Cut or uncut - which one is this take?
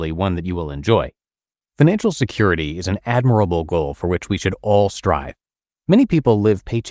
cut